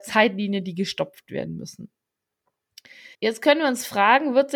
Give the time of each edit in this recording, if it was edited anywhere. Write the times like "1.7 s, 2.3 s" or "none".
3.1 s